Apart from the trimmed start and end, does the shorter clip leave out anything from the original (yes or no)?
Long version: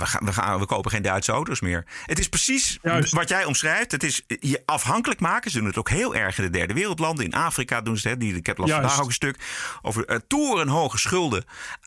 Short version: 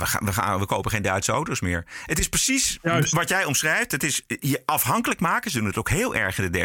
no